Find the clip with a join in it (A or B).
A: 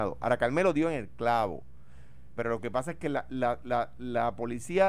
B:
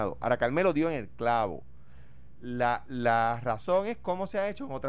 A